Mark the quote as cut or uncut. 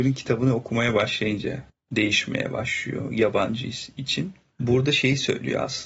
uncut